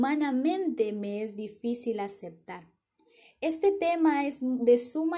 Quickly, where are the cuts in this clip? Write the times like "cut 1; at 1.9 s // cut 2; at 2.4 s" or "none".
none